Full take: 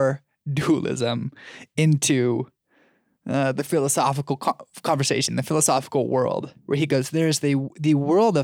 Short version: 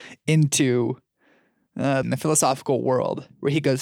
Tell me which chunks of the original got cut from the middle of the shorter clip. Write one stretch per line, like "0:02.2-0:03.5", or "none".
0:03.5-0:05.3